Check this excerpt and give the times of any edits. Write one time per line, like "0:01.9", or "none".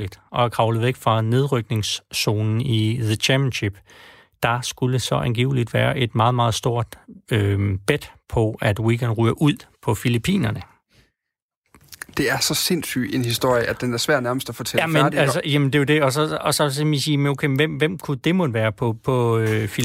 none